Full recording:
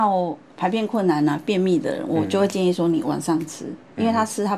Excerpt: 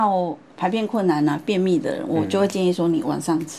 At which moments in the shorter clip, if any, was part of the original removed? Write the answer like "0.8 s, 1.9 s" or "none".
none